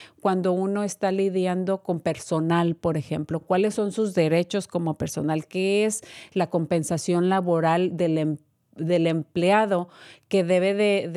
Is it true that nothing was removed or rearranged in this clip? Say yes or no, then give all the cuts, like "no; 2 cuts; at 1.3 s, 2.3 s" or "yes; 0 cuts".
yes; 0 cuts